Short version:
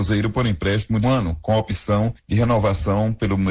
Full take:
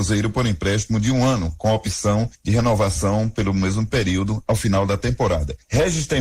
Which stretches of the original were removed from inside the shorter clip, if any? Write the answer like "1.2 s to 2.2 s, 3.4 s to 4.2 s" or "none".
1.0 s to 1.2 s